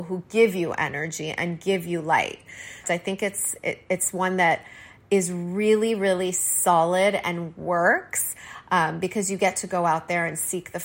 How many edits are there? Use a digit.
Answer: 1